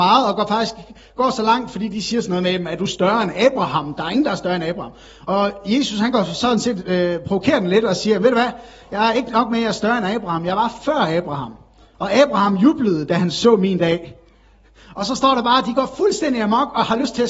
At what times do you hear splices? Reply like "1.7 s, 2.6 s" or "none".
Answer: none